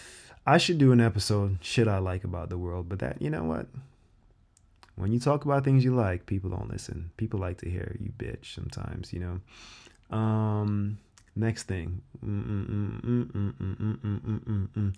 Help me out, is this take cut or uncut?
uncut